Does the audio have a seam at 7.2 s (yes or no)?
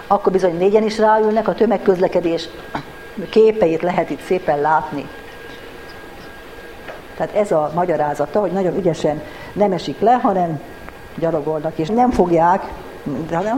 yes